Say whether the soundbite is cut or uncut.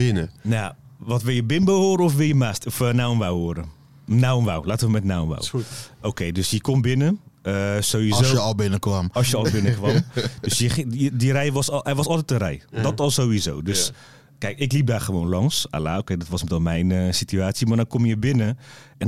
uncut